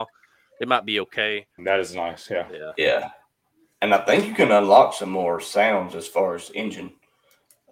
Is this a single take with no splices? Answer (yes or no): no